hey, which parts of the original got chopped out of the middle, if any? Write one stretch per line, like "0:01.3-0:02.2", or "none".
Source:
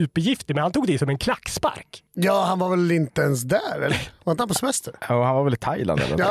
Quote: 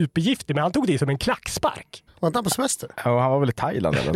0:02.1-0:04.1